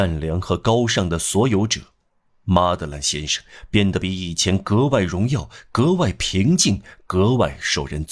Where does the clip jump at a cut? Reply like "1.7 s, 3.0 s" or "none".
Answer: none